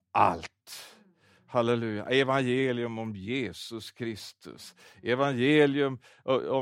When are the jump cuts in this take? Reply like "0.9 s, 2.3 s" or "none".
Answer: none

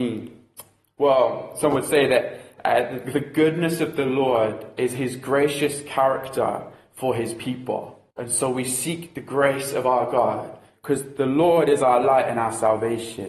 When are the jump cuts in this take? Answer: 8.1 s, 10.7 s

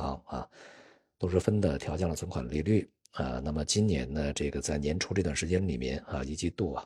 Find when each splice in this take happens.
1.4 s

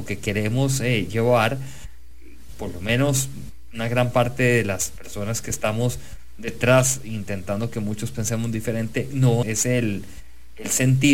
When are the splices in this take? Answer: 9.4 s

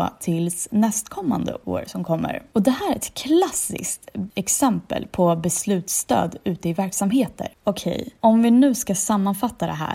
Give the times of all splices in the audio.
none

